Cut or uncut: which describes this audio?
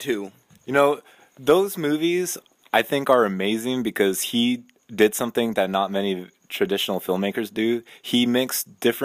uncut